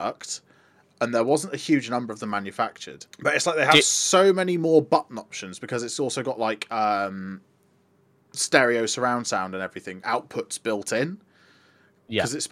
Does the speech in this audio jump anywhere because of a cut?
yes; 1 cut; at 3.1 s

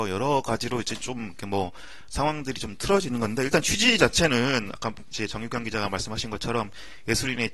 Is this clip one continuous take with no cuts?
yes; 0 cuts

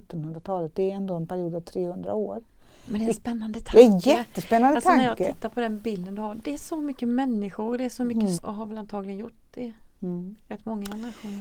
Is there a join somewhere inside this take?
yes; 1 cut; at 8.3 s

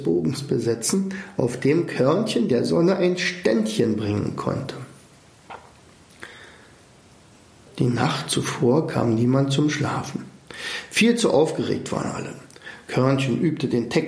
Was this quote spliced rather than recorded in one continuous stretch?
no; 0 cuts

